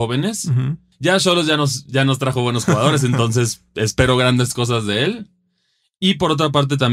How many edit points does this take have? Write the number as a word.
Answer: one